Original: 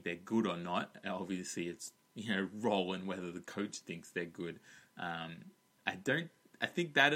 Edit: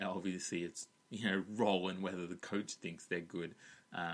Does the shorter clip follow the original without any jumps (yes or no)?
yes